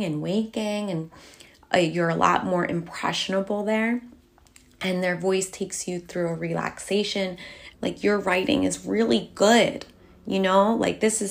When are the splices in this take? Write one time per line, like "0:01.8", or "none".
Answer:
0:07.7